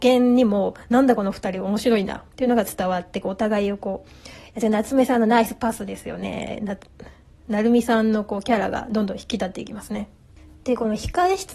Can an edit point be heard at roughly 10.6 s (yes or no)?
no